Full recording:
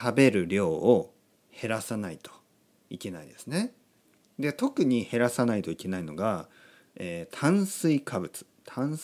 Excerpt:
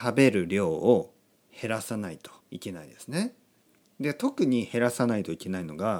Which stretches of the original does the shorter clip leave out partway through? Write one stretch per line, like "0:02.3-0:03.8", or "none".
0:02.4-0:02.8